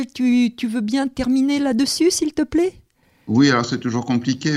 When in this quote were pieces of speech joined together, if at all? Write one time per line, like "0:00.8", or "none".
none